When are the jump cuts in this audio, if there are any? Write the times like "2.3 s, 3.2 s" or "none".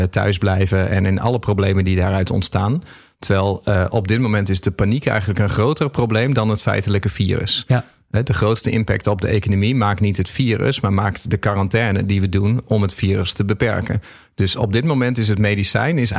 none

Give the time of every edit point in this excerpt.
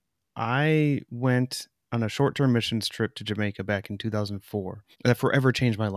4.9 s

